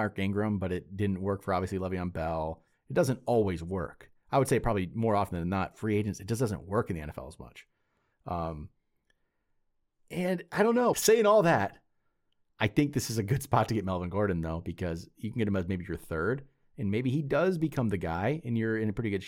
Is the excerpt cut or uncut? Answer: cut